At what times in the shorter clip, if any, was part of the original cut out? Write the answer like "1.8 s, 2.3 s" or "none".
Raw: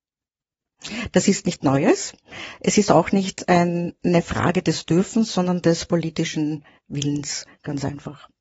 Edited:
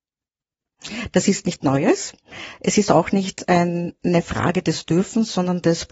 none